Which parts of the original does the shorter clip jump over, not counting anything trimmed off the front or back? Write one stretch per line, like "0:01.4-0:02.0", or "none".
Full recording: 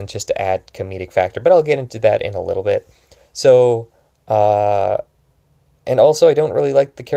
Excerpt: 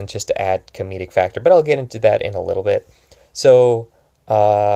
none